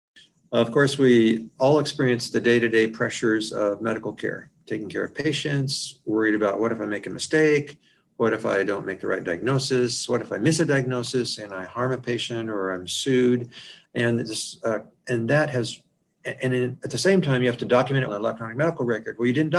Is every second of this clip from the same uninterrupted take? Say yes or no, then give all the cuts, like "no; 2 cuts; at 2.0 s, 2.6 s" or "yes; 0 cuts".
no; 2 cuts; at 13.8 s, 18.1 s